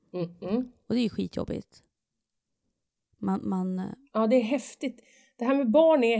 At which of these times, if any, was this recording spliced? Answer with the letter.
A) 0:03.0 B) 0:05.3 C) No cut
C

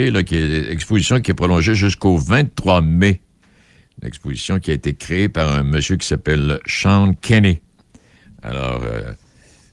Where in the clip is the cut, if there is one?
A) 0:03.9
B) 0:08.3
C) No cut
C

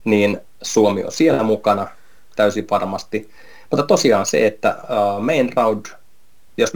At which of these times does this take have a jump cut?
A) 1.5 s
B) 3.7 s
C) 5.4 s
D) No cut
B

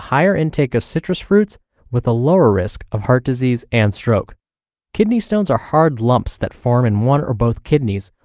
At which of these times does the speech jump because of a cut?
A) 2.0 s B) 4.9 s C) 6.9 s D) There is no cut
B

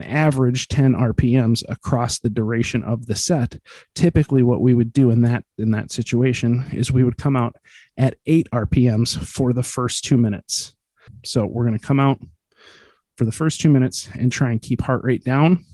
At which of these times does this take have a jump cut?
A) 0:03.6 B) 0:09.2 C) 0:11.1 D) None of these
C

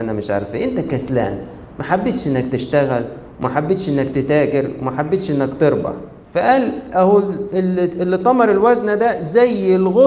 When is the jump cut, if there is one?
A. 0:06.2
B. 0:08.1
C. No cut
A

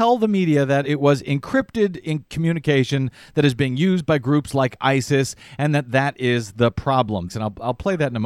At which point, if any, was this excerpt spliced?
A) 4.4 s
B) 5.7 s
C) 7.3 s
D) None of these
C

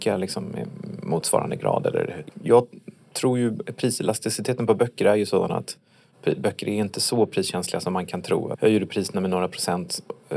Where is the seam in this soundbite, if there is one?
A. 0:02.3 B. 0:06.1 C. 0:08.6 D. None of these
A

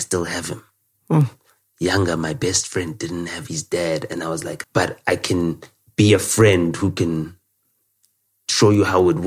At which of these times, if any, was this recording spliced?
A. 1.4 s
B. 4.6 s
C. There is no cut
B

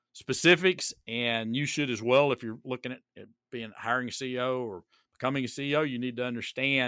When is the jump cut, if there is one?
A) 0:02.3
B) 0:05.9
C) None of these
C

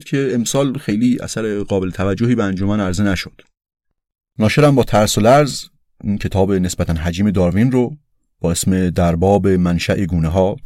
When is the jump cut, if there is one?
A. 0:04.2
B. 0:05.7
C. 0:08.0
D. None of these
A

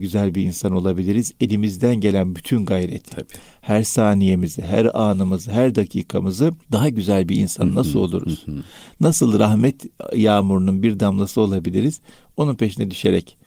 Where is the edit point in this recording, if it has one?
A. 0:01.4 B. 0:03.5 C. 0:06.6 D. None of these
C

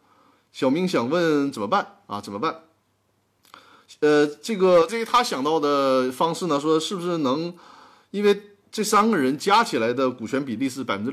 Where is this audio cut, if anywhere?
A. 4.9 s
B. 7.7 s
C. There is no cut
A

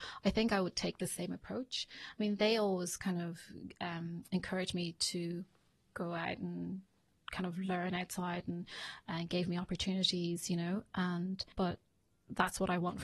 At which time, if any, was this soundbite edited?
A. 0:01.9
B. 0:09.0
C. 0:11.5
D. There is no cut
C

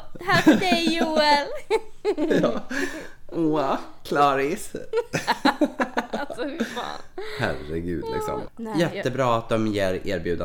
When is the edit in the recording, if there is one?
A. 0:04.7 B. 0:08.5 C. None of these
B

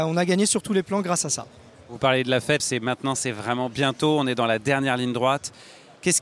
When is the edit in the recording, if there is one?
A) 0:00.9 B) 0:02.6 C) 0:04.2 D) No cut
B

